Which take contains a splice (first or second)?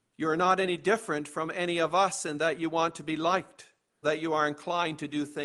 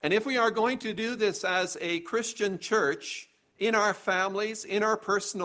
first